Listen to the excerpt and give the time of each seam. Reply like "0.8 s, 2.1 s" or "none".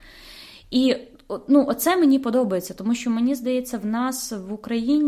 none